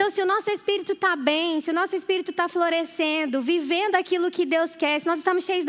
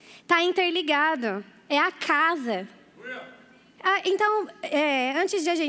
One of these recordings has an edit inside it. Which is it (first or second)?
second